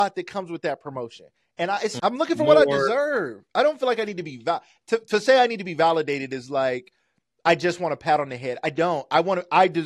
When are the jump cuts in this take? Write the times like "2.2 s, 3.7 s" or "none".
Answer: 2.0 s